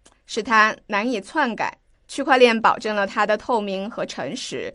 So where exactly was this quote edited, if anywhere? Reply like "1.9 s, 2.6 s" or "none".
1.9 s